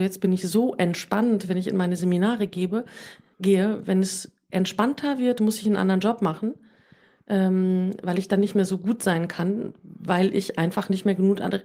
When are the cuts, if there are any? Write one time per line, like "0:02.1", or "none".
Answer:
none

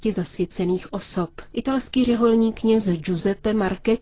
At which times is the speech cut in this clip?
0:01.5

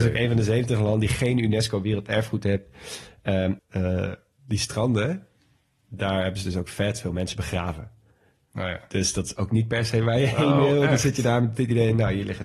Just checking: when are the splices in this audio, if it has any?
0:03.6

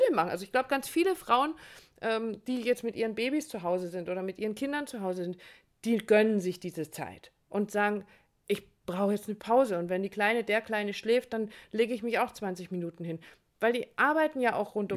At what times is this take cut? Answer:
none

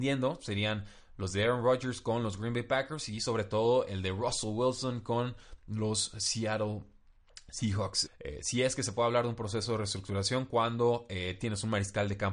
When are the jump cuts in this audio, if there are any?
0:08.1

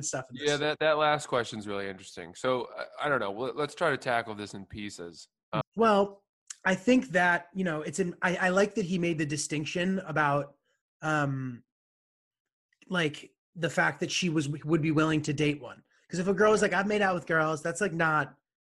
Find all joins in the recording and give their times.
0:05.6

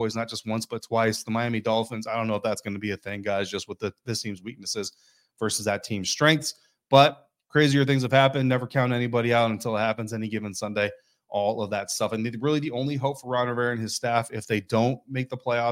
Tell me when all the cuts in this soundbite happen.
none

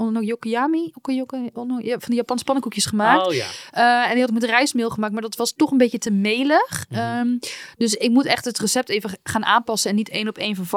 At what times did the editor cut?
none

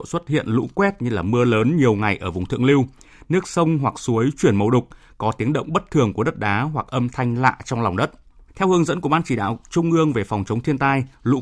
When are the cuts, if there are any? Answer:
0:08.5

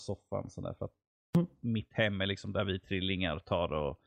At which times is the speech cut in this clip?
none

